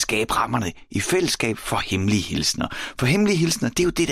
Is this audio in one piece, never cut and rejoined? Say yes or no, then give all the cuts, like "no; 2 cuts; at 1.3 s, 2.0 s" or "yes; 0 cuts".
yes; 0 cuts